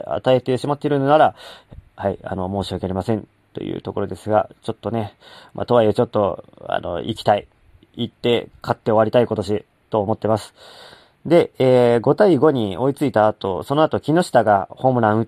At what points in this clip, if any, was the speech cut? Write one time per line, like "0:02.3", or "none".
none